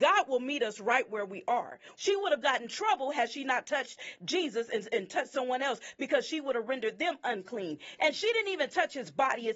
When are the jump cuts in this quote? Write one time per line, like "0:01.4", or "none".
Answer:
0:02.0
0:08.0